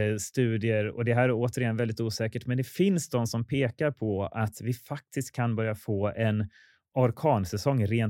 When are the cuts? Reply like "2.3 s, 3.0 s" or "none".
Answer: none